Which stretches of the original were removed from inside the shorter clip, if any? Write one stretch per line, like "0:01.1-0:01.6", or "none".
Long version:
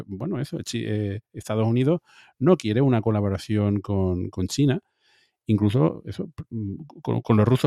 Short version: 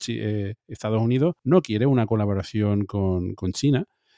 0:02.0-0:02.3